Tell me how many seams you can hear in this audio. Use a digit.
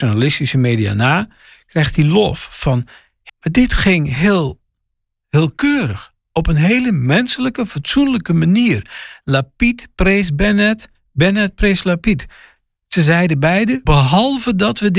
2